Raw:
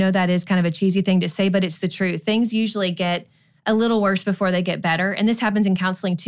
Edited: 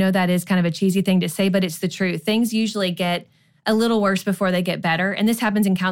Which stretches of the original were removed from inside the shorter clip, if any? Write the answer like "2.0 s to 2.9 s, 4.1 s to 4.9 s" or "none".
none

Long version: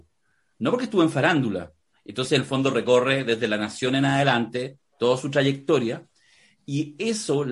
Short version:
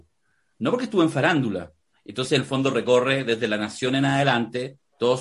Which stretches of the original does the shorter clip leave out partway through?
none

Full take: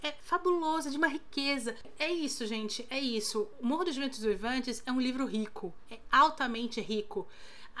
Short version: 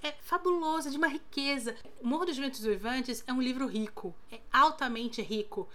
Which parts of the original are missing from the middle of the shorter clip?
2.0 s to 3.6 s

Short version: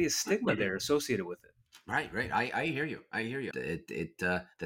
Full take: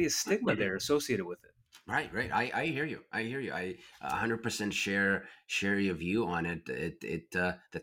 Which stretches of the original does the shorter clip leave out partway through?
3.5 s to 6.6 s

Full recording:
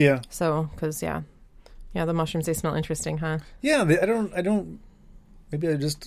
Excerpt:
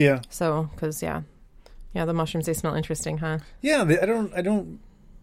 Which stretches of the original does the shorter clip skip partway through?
none

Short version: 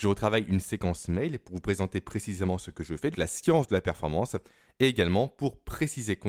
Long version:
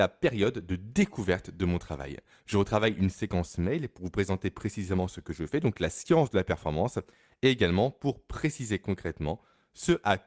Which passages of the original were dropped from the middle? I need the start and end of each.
5.6 s to 5.7 s

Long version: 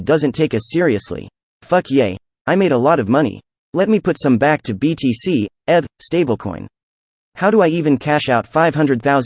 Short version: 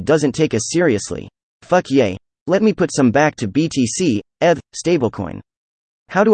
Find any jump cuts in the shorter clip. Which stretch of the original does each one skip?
2.3 s to 3.6 s

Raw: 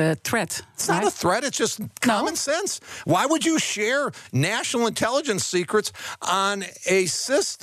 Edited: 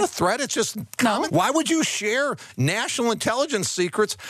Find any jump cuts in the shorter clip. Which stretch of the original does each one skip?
2.3 s to 3.0 s

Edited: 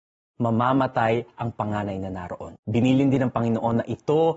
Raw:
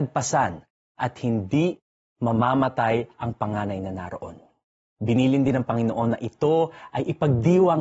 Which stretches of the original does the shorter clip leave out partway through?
4.4 s to 4.9 s

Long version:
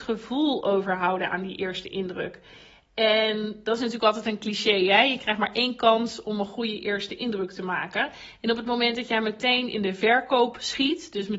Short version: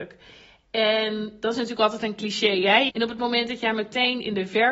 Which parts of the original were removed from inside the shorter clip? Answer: 5.1 s to 8.4 s

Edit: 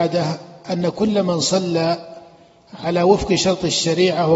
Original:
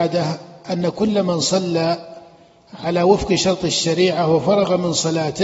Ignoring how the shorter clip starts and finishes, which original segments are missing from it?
none

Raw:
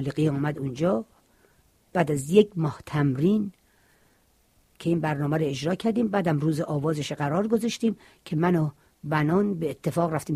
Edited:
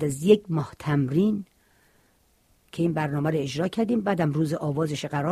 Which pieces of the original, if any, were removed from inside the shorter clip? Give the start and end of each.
none

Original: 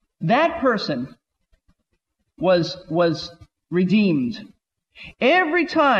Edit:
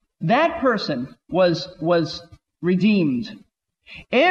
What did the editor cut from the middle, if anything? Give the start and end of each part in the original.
1.2 s to 2.3 s

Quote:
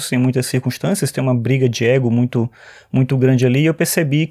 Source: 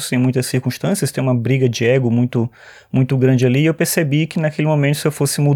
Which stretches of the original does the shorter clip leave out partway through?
none

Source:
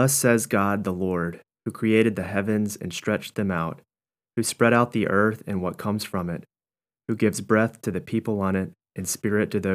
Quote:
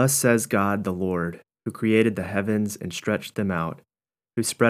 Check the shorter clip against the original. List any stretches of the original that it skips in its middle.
none

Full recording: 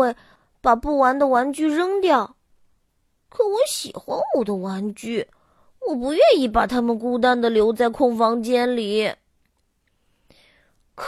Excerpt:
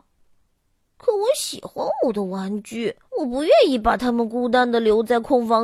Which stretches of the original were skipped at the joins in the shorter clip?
5.4 s to 5.7 s

